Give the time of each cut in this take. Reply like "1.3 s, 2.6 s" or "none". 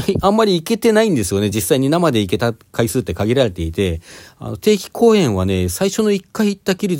none